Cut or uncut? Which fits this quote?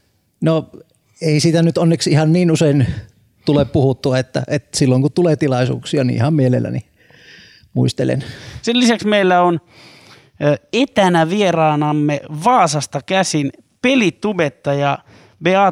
uncut